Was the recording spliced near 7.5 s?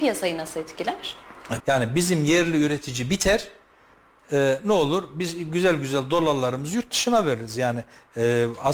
no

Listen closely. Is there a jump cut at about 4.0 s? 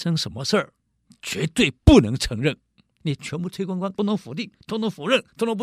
yes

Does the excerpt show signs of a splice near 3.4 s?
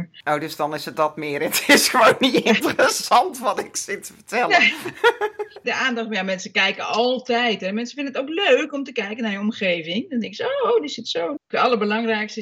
no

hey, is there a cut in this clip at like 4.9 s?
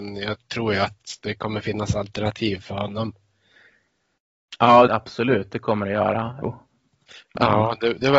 yes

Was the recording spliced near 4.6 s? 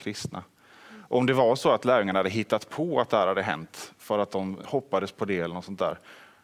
yes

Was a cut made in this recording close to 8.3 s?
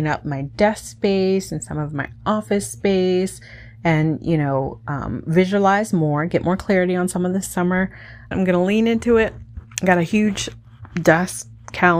yes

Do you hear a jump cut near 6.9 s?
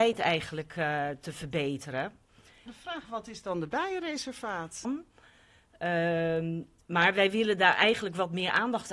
no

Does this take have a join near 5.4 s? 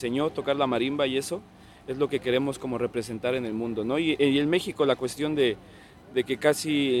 no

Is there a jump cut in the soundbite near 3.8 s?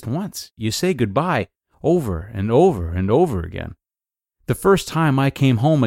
no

